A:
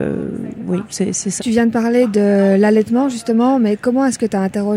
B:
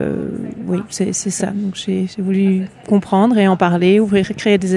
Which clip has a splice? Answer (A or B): A